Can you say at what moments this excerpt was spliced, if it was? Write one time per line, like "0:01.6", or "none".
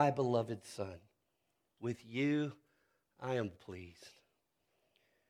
0:03.5